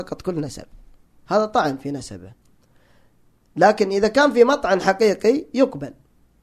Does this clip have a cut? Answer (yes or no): yes